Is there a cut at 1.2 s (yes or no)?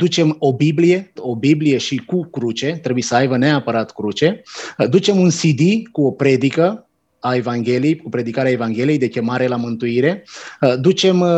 yes